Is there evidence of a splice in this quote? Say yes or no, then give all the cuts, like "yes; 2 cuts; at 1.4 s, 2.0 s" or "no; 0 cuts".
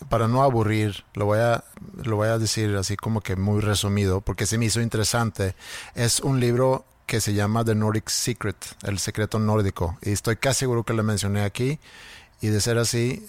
no; 0 cuts